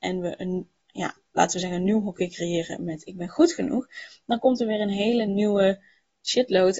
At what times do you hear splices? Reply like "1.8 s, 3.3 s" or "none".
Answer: none